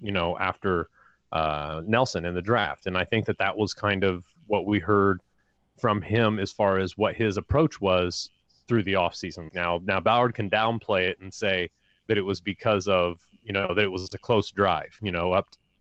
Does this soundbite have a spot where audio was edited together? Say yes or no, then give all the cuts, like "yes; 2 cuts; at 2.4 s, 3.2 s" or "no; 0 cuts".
yes; 1 cut; at 9.5 s